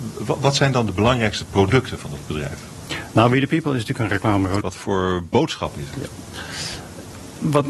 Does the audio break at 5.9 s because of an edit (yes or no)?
no